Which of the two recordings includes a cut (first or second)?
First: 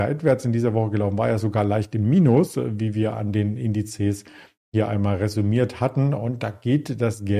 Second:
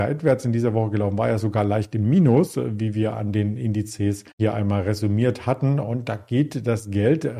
second